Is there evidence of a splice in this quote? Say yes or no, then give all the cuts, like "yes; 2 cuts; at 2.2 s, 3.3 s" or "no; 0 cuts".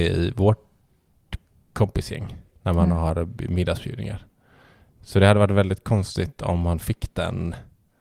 no; 0 cuts